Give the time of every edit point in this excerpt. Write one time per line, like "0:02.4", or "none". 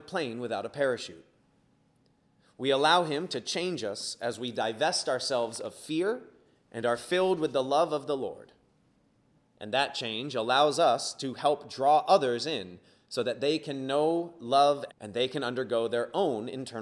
0:14.9